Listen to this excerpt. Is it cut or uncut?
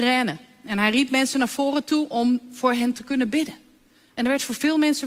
uncut